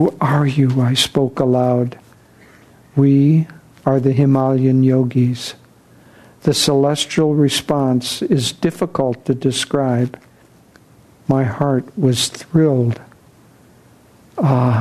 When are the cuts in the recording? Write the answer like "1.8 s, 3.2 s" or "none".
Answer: none